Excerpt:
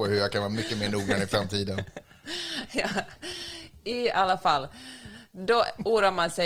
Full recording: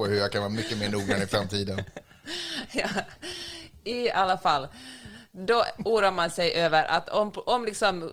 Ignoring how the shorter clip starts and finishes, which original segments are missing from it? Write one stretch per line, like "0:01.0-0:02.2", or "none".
none